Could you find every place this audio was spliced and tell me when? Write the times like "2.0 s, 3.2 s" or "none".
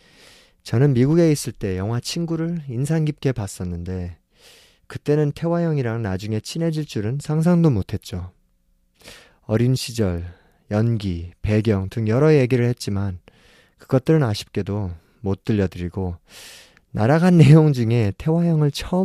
none